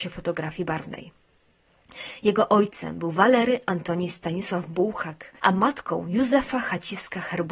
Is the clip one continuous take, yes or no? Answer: no